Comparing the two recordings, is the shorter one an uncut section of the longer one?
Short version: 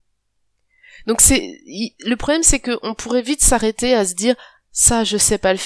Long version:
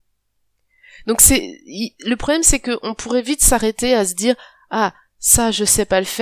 no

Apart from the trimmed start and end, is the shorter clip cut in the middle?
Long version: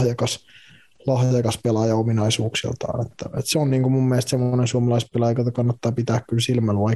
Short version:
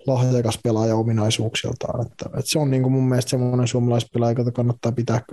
no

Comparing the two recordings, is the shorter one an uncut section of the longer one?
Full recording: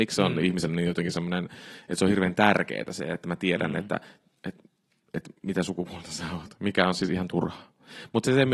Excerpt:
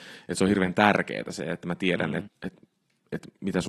no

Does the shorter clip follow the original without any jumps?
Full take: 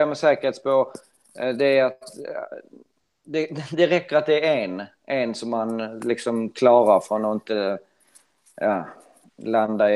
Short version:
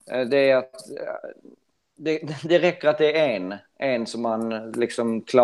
yes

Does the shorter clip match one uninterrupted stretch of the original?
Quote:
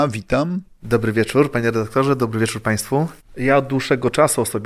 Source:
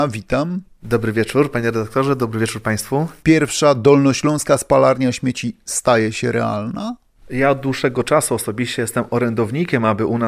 no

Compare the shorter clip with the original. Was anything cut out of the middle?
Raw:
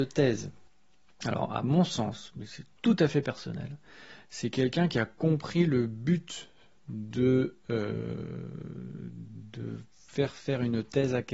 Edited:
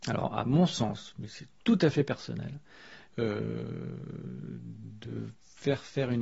yes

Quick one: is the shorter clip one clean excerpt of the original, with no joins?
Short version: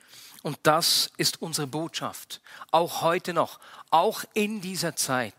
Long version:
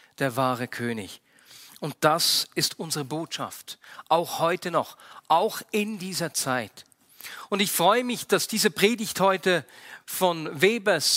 yes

